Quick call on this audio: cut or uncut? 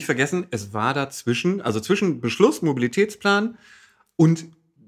uncut